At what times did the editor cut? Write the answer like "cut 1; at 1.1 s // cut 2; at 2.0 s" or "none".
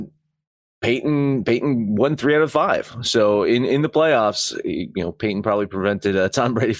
none